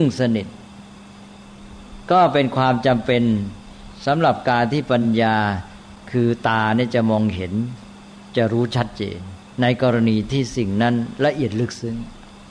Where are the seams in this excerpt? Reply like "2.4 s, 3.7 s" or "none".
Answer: none